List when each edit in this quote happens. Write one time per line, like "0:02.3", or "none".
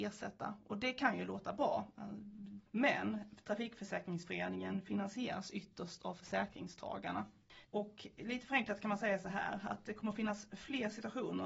0:02.7
0:07.6